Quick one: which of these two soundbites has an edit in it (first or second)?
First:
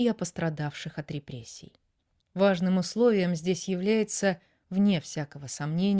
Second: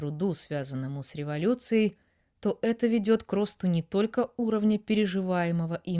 first